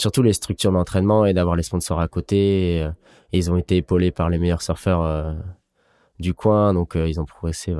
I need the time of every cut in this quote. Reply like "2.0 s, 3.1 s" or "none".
none